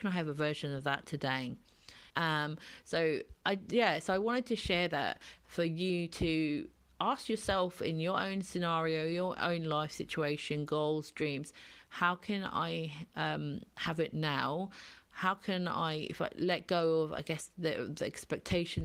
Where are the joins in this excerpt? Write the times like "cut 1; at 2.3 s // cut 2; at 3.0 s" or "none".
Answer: cut 1; at 2.1 s

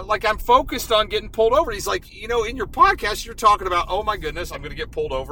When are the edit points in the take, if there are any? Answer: none

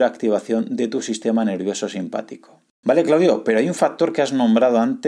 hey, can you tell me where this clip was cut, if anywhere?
none

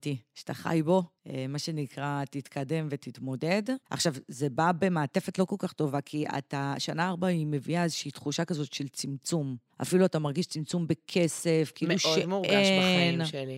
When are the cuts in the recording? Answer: cut 1; at 3.8 s

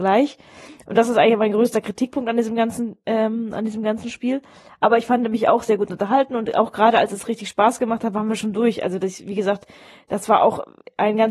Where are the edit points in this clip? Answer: none

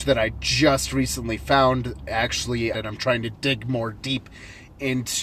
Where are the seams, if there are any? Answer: cut 1; at 2.7 s

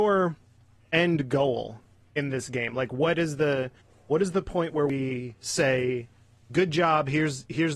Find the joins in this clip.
none

